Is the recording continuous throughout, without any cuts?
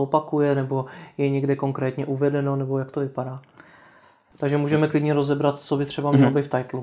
no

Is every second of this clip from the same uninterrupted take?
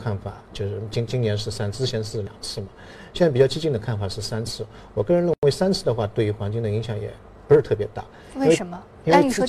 yes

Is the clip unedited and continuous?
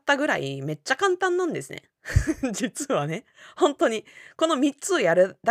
yes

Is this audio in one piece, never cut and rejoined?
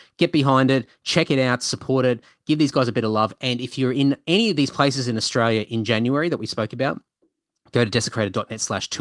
yes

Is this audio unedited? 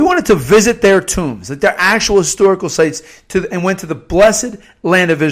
yes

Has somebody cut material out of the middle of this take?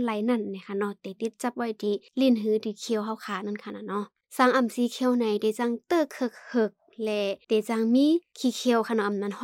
no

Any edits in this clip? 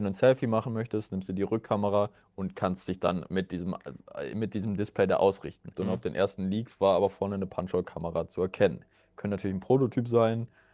yes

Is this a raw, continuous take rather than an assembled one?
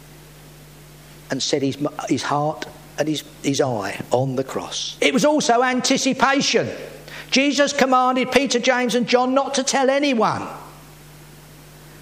no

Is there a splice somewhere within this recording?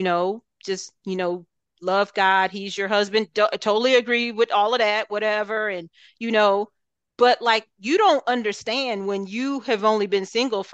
no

